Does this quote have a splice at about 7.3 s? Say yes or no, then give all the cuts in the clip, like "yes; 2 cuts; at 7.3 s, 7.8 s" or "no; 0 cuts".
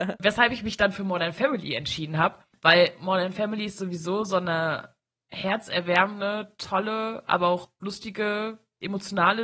no; 0 cuts